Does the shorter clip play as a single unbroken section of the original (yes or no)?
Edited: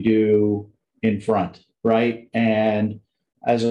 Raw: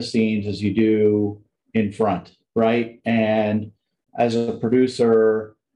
yes